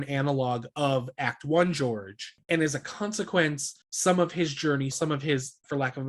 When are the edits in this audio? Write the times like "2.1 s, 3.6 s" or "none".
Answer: 3.8 s, 4.9 s